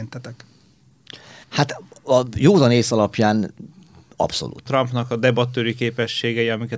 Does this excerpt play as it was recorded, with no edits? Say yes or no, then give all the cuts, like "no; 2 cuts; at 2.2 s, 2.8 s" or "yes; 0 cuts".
no; 2 cuts; at 1.4 s, 4.7 s